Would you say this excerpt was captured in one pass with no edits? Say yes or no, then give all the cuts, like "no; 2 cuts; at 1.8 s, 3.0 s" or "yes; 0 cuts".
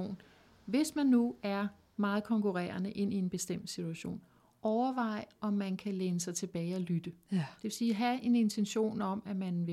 yes; 0 cuts